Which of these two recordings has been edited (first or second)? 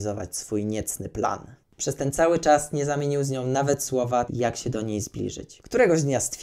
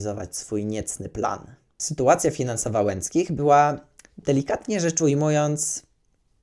first